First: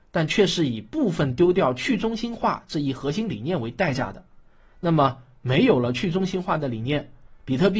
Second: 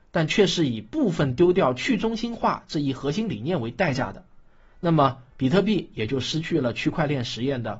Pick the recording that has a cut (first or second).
second